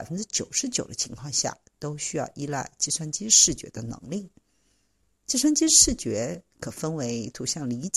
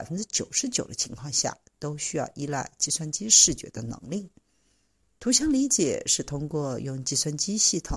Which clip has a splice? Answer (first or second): second